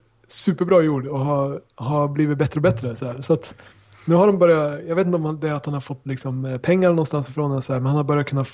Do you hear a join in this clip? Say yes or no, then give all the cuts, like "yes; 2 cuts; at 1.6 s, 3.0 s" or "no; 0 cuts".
no; 0 cuts